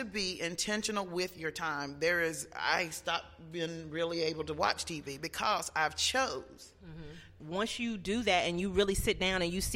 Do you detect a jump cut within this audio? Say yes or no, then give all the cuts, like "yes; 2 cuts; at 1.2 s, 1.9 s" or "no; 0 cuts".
yes; 1 cut; at 7.4 s